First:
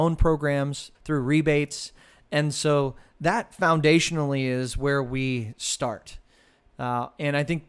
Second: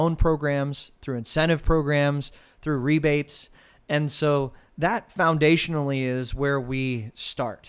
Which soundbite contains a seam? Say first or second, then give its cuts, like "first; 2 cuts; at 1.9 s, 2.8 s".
first; 2 cuts; at 0.9 s, 6.7 s